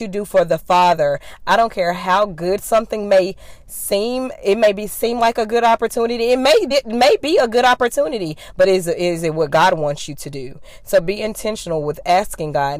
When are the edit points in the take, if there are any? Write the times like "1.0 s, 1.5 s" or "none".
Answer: none